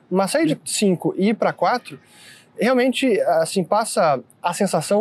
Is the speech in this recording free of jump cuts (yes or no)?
yes